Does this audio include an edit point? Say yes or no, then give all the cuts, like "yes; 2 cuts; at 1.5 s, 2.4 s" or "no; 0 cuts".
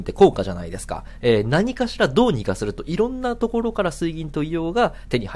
yes; 1 cut; at 1.2 s